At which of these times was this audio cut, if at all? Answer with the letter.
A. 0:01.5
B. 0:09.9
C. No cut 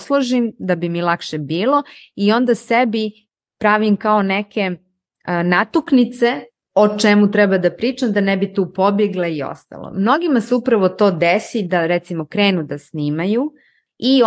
C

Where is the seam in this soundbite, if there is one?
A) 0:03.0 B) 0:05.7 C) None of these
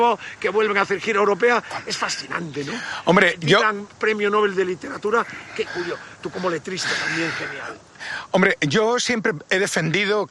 B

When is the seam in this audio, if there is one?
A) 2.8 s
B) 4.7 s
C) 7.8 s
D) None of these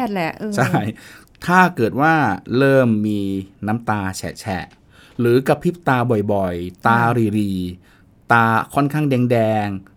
D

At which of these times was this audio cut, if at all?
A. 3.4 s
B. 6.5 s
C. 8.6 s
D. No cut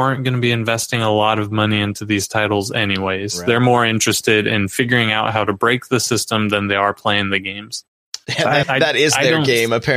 C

